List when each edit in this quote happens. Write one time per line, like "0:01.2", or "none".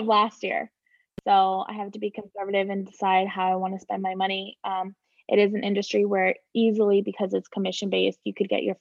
none